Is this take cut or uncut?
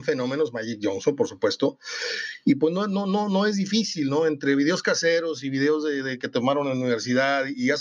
uncut